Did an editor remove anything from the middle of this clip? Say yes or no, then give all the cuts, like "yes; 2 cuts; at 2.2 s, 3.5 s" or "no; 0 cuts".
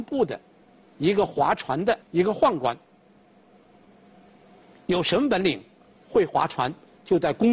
no; 0 cuts